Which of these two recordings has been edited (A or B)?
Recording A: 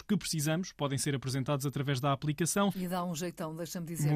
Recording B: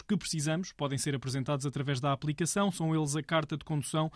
A